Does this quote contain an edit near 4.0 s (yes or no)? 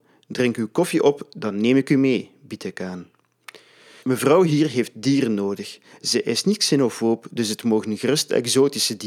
yes